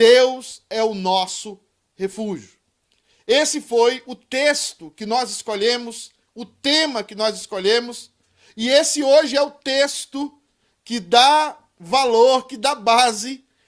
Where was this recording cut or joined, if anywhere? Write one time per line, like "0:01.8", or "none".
none